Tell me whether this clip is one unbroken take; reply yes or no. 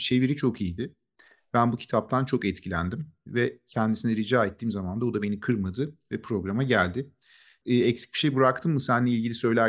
no